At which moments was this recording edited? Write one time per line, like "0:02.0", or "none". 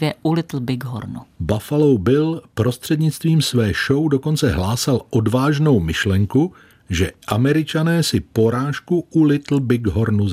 0:01.4